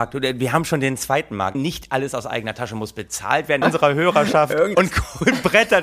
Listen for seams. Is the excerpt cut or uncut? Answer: cut